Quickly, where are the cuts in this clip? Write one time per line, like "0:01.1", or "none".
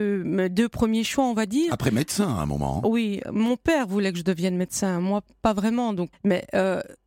0:06.1

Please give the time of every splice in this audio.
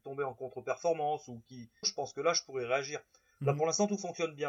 0:01.8

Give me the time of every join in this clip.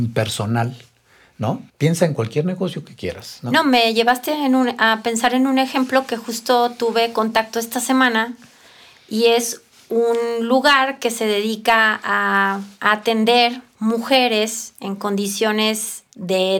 0:01.7

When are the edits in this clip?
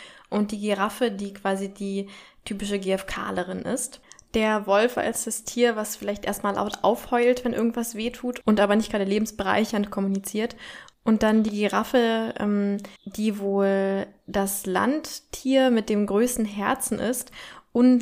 0:13.0

